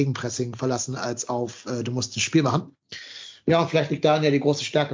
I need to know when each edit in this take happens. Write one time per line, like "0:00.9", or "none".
none